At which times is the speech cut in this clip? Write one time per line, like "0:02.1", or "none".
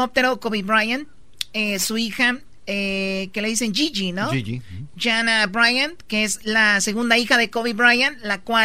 none